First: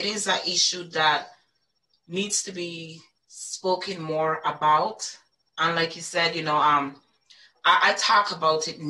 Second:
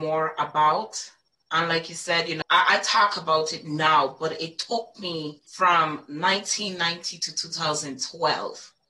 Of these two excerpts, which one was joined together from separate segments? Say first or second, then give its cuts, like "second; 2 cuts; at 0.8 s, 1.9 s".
second; 2 cuts; at 2.4 s, 5.5 s